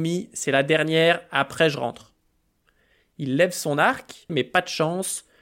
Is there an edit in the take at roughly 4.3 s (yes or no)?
yes